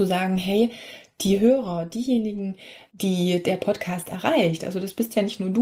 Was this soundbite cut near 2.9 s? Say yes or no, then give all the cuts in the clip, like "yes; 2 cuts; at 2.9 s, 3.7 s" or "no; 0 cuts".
yes; 1 cut; at 2.9 s